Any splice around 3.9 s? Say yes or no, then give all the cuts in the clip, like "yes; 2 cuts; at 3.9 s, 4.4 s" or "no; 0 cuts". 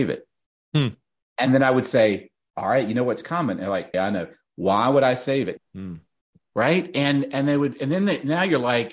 yes; 2 cuts; at 3.9 s, 5.6 s